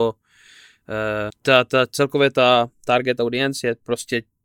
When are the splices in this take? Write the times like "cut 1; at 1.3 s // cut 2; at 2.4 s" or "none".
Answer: cut 1; at 1.3 s